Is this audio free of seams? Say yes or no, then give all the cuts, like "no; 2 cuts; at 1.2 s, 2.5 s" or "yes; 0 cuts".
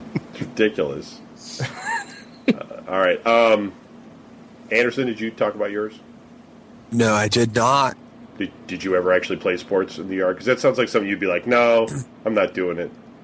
yes; 0 cuts